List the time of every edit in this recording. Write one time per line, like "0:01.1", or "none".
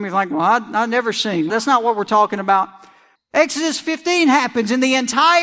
0:01.5
0:03.1